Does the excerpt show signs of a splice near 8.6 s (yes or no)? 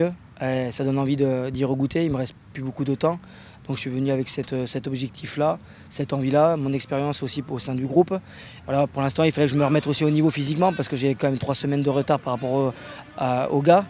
yes